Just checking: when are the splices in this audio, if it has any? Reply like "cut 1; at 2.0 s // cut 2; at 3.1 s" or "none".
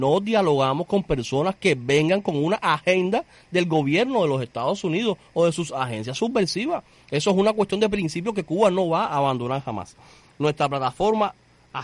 cut 1; at 10.2 s